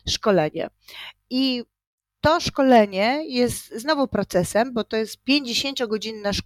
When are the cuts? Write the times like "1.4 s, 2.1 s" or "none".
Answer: none